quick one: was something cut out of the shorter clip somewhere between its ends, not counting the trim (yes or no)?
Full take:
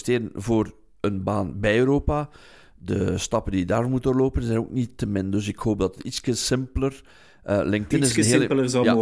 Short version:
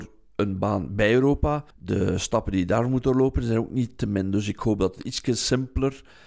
yes